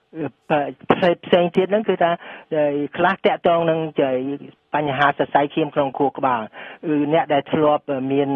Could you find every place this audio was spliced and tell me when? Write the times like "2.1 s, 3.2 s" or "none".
none